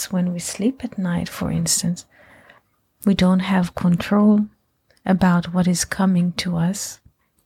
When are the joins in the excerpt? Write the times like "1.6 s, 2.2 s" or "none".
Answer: none